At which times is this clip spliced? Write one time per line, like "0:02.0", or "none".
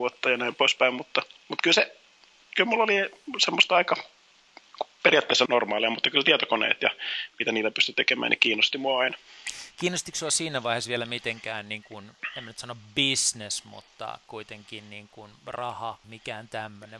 0:05.5
0:16.0